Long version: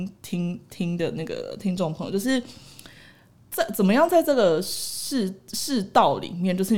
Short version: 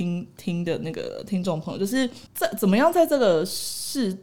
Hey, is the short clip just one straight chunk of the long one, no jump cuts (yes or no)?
no